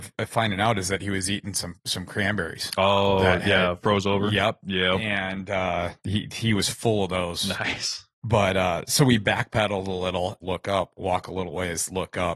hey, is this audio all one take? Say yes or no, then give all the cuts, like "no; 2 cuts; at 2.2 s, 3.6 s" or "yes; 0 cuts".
no; 2 cuts; at 8.1 s, 10.4 s